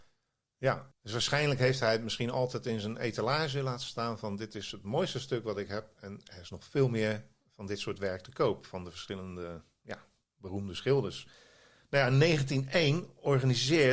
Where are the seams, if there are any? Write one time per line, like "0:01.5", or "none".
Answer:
0:00.9